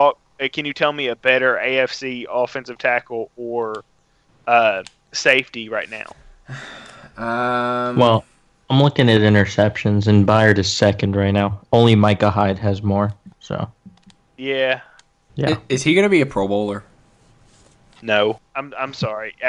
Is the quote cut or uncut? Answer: cut